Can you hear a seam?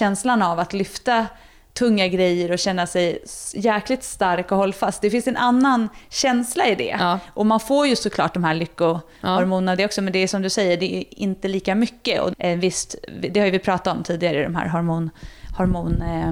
yes; 1 cut; at 12.3 s

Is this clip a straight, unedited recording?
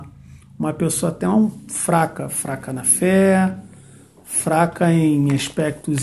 yes; 0 cuts

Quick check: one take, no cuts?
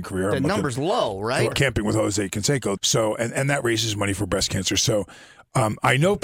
no; 2 cuts; at 1.5 s, 2.8 s

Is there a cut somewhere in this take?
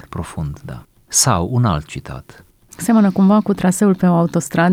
yes; 1 cut; at 2.7 s

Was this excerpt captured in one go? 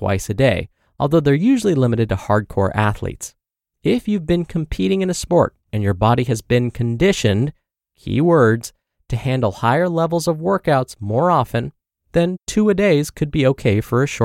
yes; 0 cuts

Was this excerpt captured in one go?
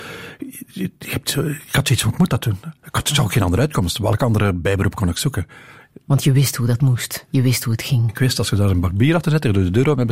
yes; 0 cuts

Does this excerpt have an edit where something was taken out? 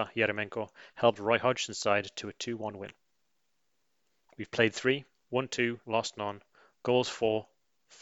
yes; 1 cut; at 5.8 s

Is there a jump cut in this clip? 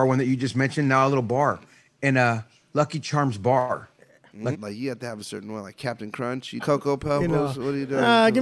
yes; 2 cuts; at 4.5 s, 6.6 s

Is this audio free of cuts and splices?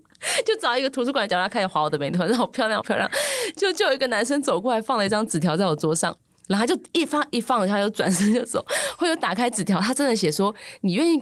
yes; 0 cuts

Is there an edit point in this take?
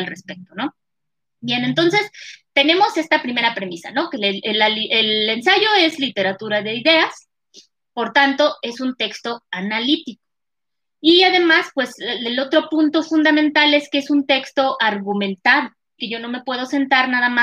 yes; 1 cut; at 16.0 s

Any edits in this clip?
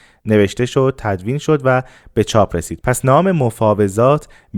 no; 0 cuts

